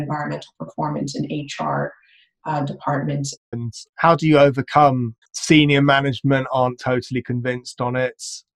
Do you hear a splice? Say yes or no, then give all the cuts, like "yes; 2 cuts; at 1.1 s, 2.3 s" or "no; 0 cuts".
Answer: yes; 2 cuts; at 3.5 s, 5.2 s